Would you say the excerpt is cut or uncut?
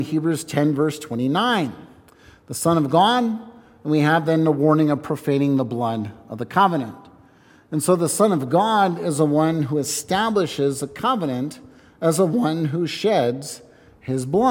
uncut